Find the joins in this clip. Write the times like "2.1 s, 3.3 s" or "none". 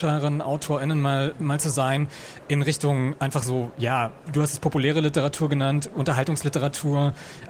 4.3 s